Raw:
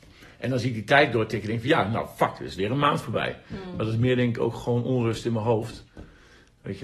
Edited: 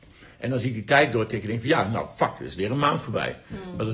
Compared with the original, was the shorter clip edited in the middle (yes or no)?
no